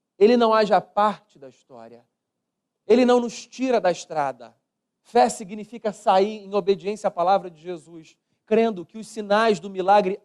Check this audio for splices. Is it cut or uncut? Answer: cut